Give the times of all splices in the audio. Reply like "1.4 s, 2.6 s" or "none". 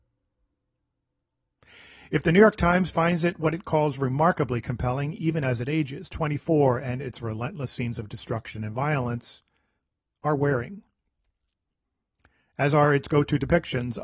none